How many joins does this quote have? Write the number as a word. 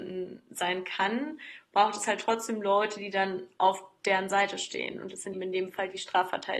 one